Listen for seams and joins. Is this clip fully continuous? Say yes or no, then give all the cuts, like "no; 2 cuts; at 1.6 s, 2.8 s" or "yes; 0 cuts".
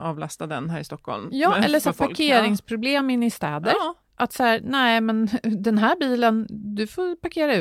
yes; 0 cuts